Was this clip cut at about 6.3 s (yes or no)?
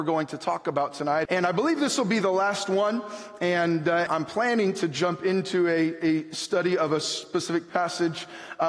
no